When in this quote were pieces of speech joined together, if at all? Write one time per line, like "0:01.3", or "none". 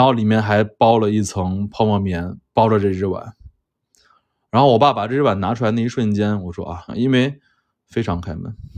0:06.9